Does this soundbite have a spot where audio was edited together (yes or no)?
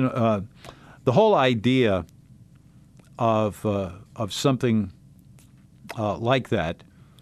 no